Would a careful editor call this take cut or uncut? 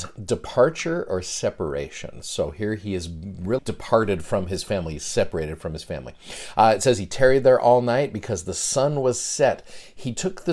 cut